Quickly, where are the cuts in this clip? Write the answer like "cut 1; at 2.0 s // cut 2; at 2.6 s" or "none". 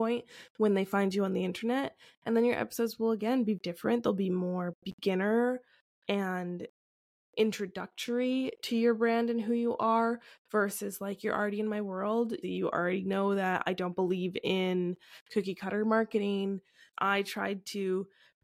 cut 1; at 3.6 s // cut 2; at 12.4 s // cut 3; at 16.9 s